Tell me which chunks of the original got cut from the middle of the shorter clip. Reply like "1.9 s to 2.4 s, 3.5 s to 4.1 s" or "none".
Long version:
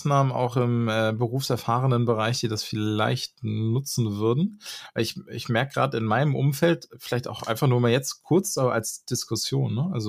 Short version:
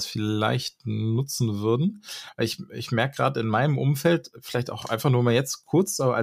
none